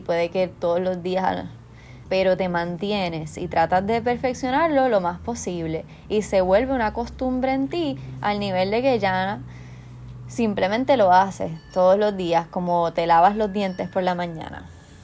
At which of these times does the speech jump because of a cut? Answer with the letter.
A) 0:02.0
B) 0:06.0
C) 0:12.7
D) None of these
A